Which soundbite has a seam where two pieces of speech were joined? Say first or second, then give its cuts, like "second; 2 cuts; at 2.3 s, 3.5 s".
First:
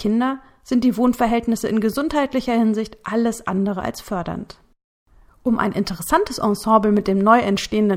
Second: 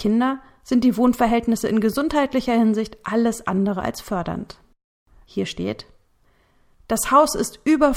second; 1 cut; at 5.2 s